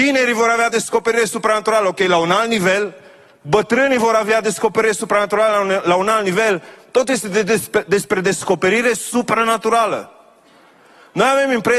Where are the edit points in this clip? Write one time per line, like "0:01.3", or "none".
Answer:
none